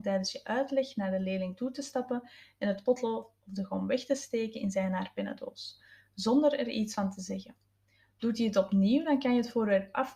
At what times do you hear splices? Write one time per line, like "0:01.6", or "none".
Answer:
none